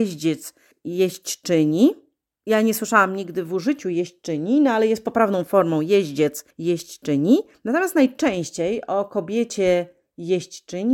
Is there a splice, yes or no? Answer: no